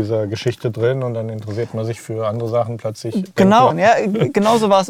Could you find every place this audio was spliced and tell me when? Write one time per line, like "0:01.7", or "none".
0:03.7